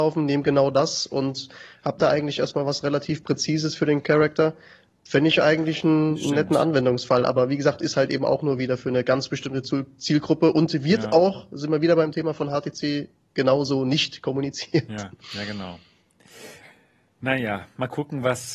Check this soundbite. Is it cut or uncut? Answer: uncut